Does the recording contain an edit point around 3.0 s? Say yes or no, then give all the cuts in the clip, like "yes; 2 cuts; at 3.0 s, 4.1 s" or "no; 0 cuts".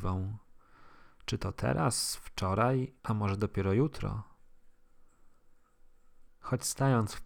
yes; 2 cuts; at 3.0 s, 6.3 s